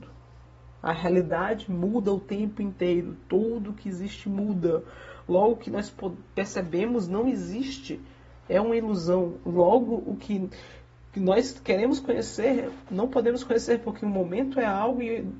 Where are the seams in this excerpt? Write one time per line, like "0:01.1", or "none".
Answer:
none